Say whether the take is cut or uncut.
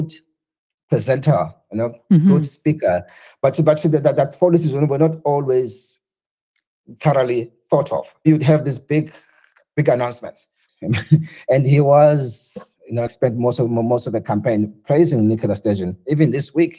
cut